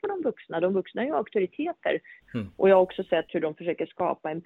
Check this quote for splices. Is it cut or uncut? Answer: cut